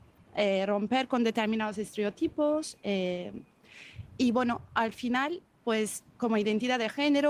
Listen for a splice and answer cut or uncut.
uncut